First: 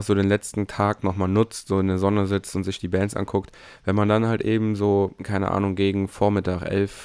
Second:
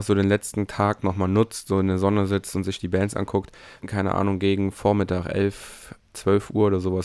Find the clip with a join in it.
second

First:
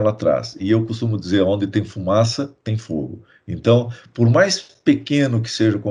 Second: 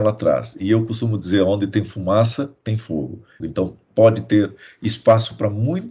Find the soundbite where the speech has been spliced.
second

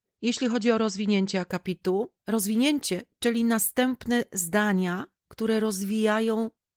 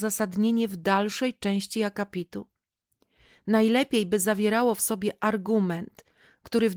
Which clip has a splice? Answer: first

